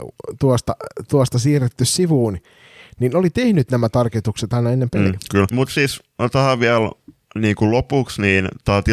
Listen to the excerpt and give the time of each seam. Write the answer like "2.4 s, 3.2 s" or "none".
5.5 s